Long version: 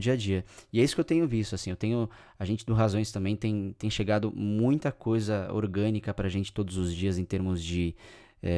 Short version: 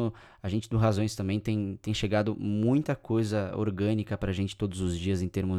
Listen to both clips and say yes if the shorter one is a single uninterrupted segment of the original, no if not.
yes